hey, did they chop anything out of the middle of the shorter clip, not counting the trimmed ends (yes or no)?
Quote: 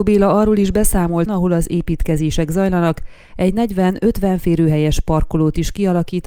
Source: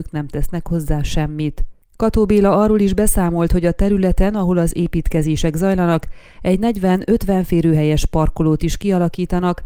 yes